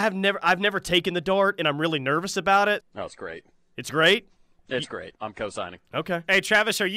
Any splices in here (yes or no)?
yes